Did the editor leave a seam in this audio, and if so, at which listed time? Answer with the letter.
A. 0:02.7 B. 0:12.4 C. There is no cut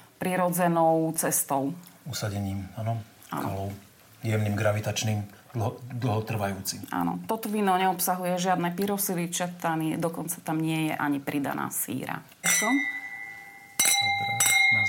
B